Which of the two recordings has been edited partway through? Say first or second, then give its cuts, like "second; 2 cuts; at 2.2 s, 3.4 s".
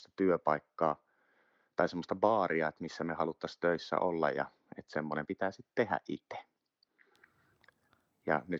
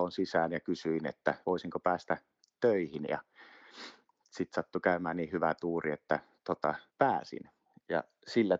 second; 2 cuts; at 1.4 s, 6.9 s